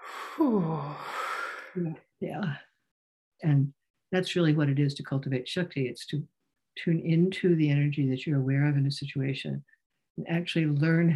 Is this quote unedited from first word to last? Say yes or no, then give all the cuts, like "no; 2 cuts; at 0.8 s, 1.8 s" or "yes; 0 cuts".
no; 1 cut; at 3.4 s